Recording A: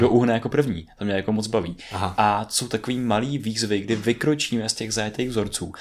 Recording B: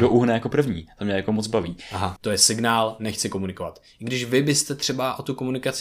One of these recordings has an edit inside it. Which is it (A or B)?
B